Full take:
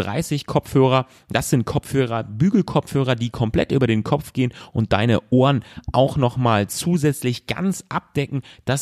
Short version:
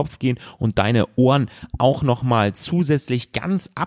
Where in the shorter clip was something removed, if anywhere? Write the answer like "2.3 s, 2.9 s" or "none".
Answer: none